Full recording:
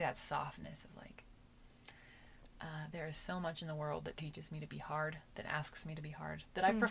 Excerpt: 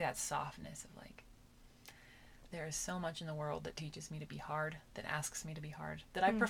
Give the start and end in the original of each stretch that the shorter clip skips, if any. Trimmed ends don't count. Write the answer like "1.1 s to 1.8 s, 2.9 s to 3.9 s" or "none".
2.5 s to 2.9 s